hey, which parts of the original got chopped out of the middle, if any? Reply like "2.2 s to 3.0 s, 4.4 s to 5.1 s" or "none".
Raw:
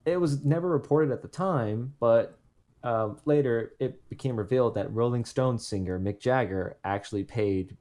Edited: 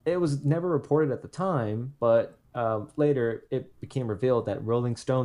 2.5 s to 2.8 s